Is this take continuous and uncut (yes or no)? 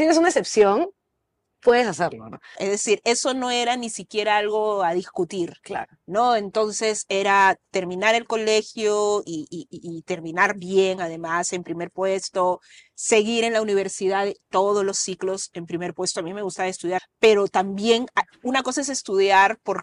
no